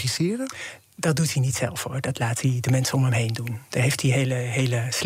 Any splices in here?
no; 0 cuts

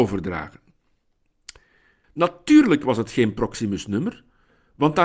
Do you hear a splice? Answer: yes; 1 cut; at 2.0 s

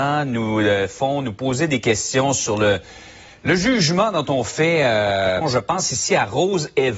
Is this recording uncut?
no; 1 cut; at 5.4 s

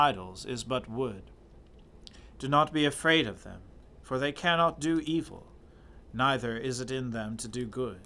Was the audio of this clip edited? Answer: yes; 1 cut; at 2.4 s

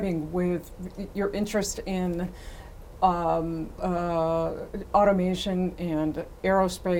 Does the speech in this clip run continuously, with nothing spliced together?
no; 2 cuts; at 3.8 s, 4.9 s

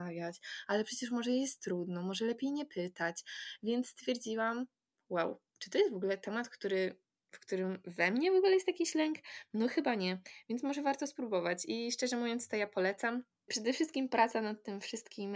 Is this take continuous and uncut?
no; 1 cut; at 13.5 s

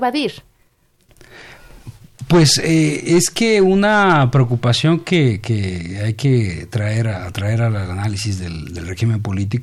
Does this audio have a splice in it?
no; 0 cuts

